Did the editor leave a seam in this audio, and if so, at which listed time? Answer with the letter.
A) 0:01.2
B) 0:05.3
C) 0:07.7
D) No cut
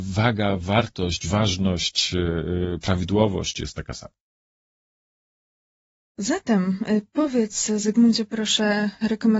D